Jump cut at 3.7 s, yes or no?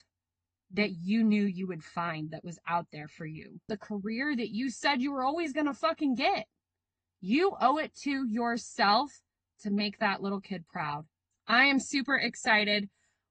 yes